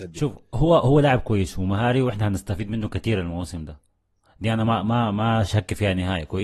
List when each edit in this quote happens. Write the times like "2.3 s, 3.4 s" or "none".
none